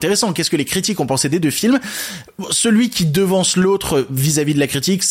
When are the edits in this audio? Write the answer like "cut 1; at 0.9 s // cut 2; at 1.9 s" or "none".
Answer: none